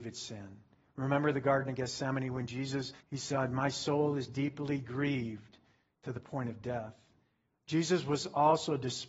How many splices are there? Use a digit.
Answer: 2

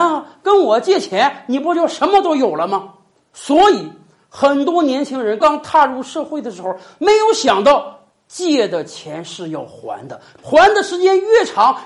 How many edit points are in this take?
2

